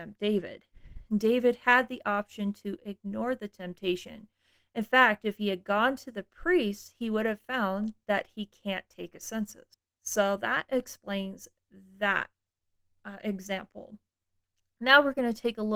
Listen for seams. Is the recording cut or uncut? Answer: uncut